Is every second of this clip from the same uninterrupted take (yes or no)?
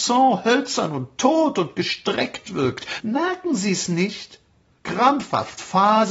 no